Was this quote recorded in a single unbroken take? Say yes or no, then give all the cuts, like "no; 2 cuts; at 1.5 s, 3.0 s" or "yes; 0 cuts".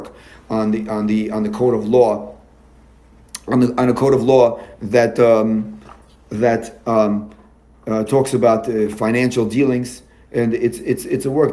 yes; 0 cuts